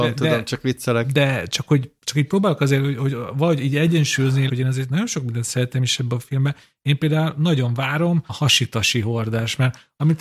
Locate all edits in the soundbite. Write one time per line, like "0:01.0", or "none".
0:04.5
0:08.3